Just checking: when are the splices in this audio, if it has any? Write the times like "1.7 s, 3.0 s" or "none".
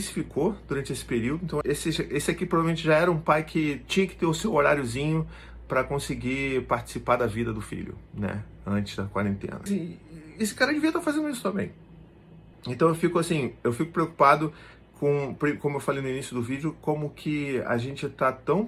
1.6 s, 9.7 s, 12.5 s